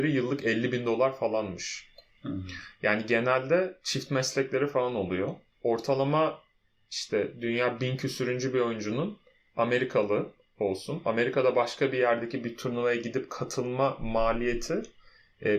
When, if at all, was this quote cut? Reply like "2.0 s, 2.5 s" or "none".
none

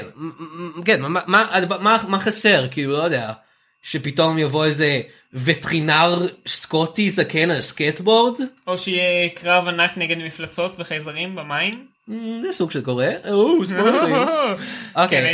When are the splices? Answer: none

